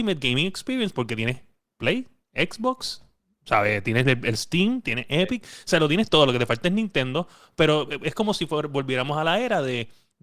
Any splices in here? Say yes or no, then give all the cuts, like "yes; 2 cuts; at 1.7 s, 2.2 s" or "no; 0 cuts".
no; 0 cuts